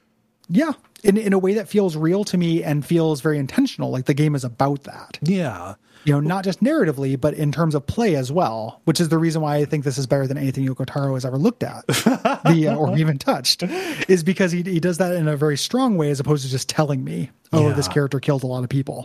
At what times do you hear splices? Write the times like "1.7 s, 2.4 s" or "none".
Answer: none